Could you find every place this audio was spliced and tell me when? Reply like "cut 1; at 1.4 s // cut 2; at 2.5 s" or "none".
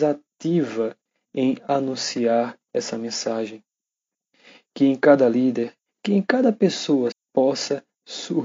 cut 1; at 5.9 s // cut 2; at 7.1 s